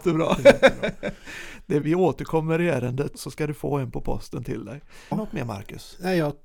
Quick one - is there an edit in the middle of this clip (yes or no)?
yes